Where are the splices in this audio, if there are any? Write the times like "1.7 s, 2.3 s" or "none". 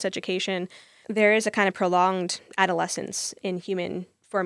1.0 s, 3.4 s